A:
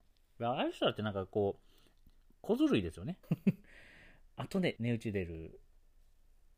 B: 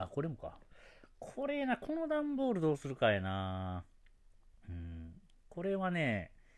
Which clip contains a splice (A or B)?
A